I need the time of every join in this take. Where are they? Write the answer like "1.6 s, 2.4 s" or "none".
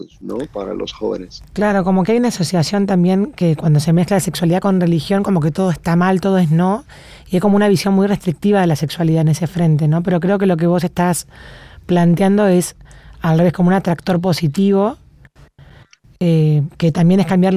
1.4 s